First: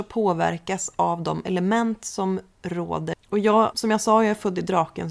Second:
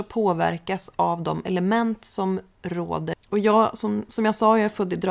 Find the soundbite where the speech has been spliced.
first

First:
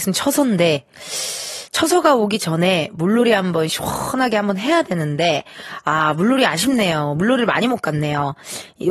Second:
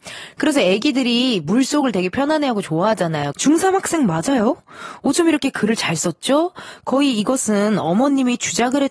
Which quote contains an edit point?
second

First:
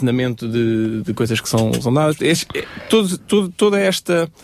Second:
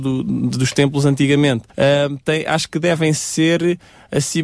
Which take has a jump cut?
second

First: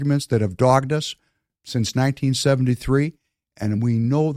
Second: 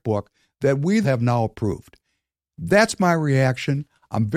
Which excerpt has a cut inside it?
second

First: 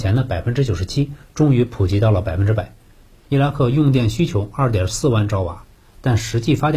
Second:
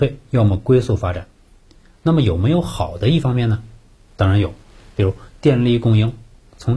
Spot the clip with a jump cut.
first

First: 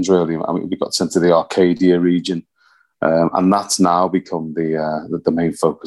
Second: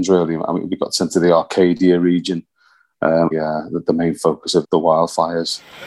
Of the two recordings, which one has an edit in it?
second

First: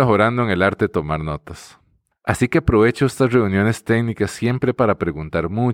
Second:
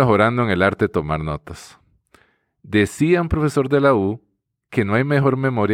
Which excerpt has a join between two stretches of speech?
first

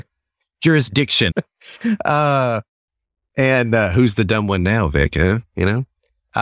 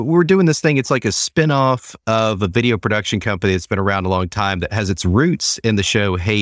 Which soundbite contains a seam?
first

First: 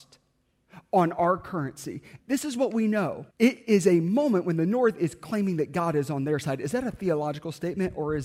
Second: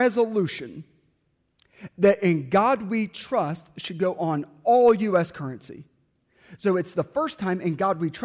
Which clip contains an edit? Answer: first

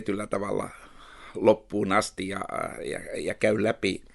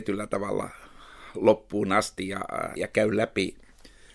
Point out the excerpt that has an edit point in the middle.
second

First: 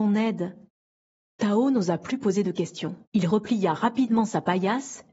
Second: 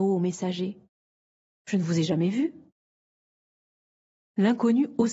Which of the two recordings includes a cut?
first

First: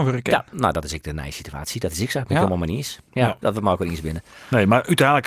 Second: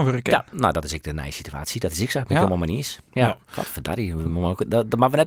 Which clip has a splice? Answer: first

